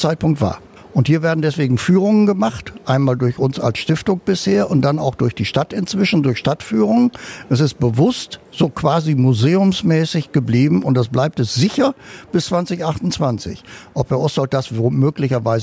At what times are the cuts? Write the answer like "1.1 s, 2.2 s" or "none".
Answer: none